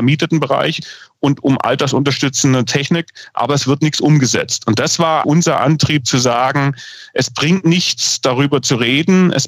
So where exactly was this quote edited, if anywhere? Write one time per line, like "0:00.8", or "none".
0:05.2